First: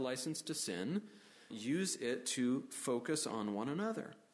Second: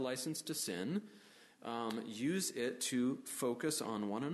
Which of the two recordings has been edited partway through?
first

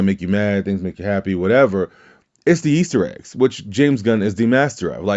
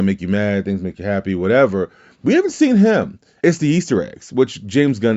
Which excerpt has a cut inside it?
second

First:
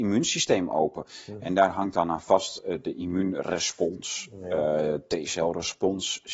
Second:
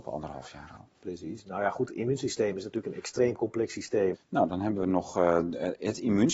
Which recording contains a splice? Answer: second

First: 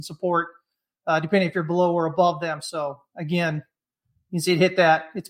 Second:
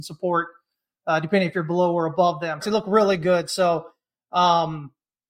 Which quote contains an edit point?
second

